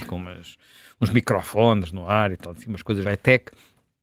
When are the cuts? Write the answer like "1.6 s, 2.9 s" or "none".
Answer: 3.0 s